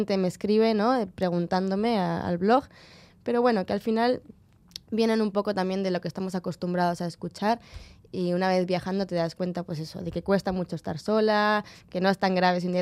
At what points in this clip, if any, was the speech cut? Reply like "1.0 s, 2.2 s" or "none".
3.1 s